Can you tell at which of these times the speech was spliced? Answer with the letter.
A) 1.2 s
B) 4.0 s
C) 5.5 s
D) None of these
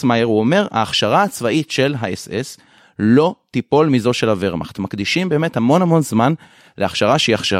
D